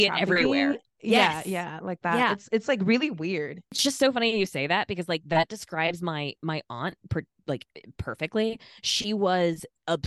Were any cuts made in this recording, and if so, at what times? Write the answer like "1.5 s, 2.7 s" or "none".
none